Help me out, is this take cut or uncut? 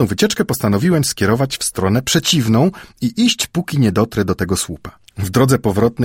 cut